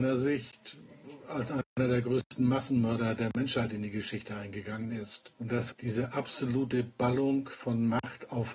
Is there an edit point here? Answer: yes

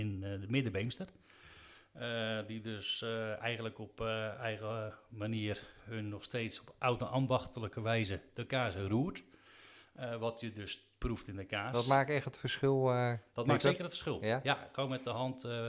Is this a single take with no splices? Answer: yes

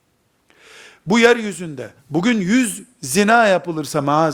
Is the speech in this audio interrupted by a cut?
yes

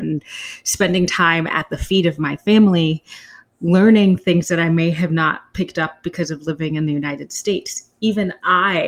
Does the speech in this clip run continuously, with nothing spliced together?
yes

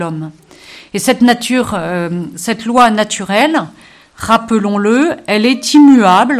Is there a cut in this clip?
no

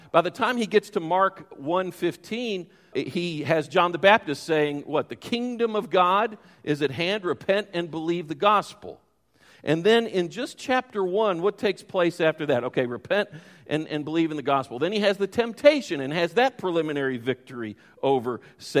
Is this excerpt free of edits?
no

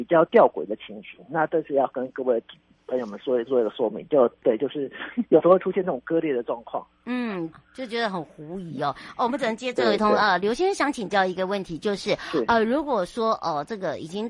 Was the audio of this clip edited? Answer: yes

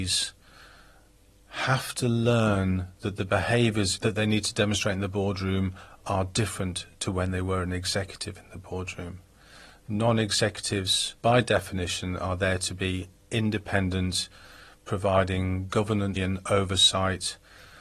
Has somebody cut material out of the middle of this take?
yes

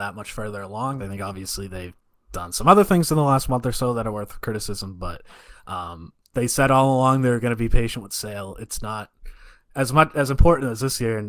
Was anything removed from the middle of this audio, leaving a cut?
yes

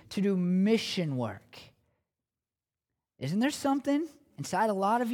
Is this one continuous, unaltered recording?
yes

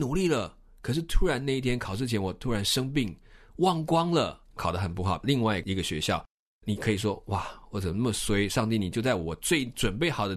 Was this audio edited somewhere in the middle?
no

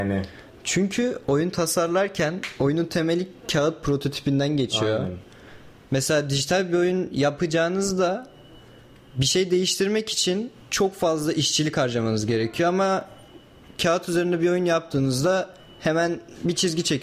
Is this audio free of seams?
yes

